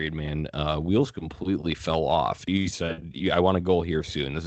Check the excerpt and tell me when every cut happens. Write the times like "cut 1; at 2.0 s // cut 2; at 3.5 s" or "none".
cut 1; at 2.5 s